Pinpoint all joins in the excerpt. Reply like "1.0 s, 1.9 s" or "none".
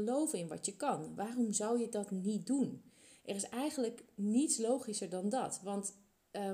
none